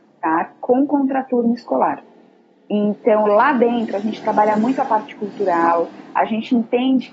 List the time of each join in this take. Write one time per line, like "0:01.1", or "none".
none